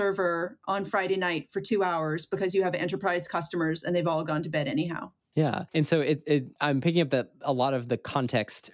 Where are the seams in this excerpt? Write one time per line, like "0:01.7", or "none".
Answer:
none